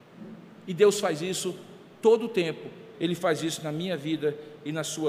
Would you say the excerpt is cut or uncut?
cut